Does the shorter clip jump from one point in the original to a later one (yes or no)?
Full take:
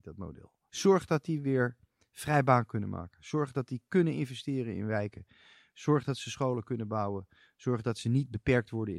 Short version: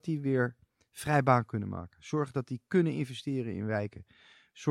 no